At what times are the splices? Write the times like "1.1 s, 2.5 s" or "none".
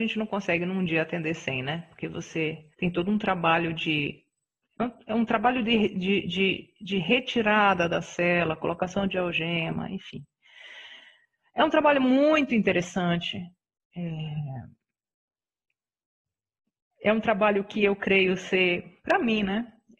2.7 s